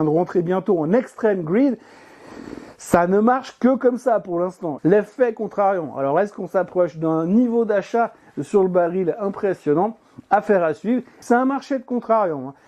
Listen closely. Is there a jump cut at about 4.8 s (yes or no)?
yes